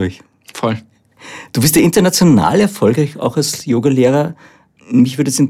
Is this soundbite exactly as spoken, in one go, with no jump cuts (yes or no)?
yes